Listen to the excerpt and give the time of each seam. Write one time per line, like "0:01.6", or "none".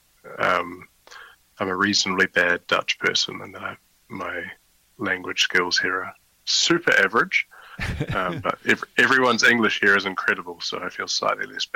none